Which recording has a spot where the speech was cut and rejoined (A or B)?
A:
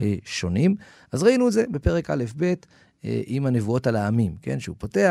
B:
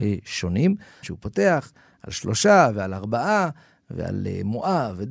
B